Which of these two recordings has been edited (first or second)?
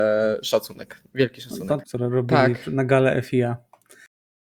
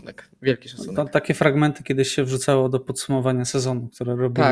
first